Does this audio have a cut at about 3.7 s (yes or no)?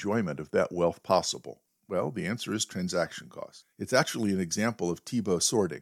no